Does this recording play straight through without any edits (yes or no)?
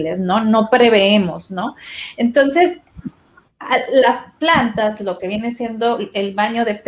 yes